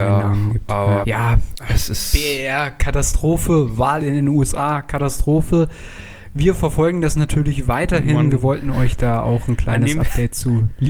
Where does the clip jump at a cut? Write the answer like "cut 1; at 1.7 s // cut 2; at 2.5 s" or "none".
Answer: cut 1; at 1.0 s